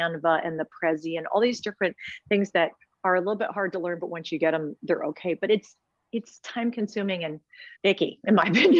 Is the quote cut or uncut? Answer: cut